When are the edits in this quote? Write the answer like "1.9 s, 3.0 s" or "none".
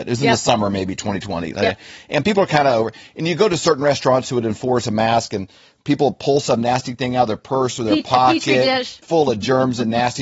9.0 s

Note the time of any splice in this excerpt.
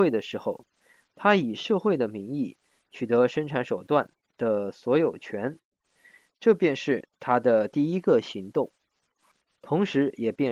none

